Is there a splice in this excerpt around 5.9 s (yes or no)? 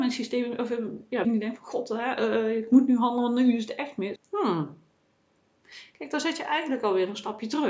no